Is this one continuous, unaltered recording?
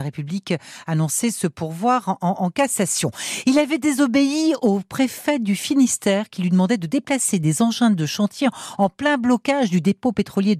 yes; 0 cuts

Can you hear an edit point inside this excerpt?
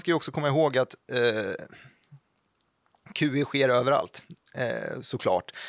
no; 0 cuts

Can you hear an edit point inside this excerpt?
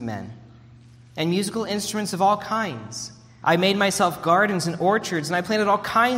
yes; 1 cut; at 3.4 s

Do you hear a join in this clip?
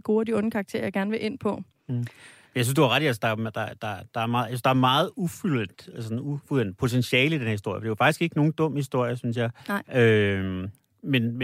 no; 0 cuts

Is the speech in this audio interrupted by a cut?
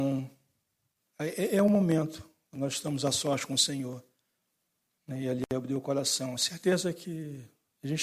no; 0 cuts

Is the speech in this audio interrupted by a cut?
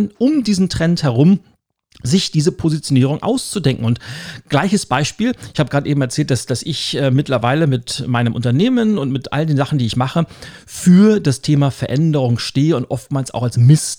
no; 0 cuts

